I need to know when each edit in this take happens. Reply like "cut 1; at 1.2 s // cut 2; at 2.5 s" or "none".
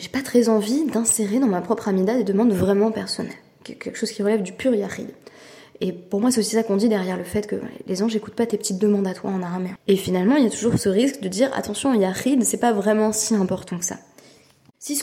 cut 1; at 9.8 s